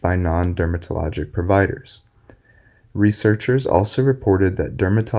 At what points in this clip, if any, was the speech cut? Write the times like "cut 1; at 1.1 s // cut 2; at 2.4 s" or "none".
none